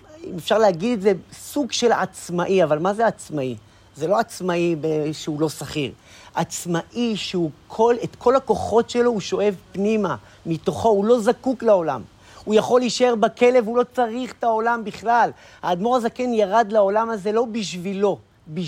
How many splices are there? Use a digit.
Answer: 0